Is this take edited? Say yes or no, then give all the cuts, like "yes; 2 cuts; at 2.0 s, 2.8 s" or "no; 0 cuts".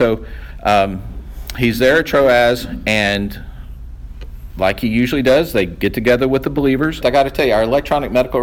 yes; 1 cut; at 7.0 s